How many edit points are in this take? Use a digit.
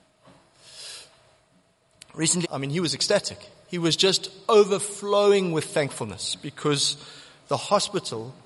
1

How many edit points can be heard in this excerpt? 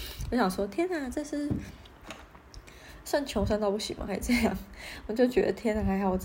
0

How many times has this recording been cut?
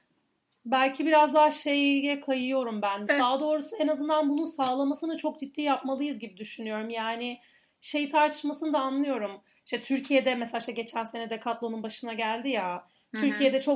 1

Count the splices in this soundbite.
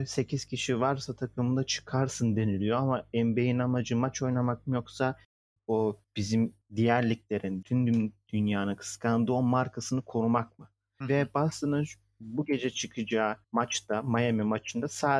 3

